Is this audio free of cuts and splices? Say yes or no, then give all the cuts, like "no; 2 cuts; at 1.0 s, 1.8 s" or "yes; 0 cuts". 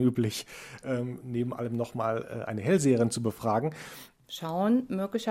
no; 1 cut; at 4.2 s